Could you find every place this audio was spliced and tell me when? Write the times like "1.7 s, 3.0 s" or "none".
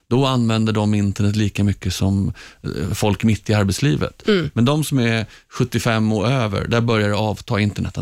none